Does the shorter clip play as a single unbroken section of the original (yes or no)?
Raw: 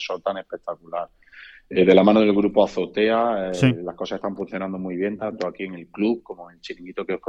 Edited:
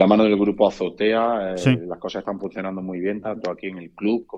yes